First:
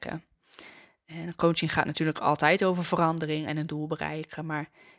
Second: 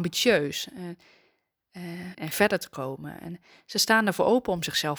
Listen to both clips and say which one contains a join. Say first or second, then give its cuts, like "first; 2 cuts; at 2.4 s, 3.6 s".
second; 1 cut; at 2.1 s